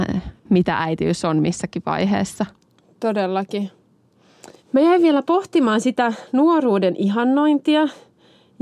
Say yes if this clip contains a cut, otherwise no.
yes